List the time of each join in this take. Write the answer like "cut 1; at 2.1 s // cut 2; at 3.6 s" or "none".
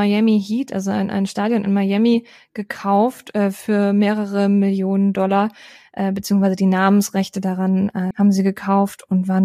cut 1; at 8.1 s